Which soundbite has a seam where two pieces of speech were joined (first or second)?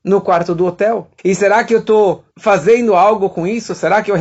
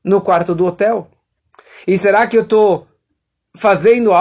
first